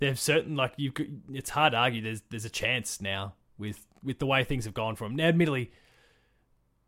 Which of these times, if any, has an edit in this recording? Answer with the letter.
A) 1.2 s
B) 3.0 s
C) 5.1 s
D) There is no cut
D